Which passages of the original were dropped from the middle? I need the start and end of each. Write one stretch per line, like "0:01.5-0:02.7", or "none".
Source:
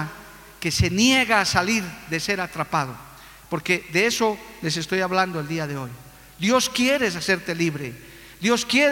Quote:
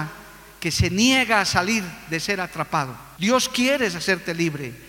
0:03.2-0:06.4